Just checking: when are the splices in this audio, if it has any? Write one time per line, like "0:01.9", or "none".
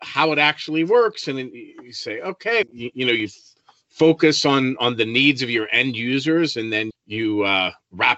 0:02.6
0:06.9